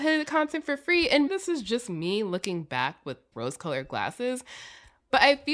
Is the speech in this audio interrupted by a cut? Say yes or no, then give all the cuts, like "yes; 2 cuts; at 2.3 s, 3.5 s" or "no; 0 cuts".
yes; 2 cuts; at 1.3 s, 3.3 s